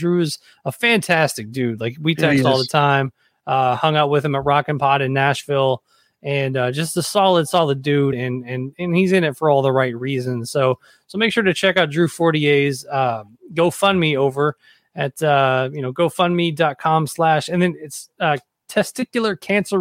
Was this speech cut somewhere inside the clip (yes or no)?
no